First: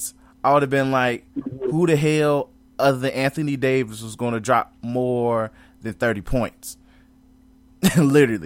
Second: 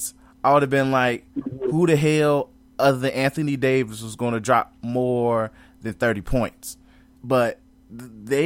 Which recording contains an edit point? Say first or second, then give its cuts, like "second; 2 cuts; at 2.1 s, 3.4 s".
second; 1 cut; at 7.2 s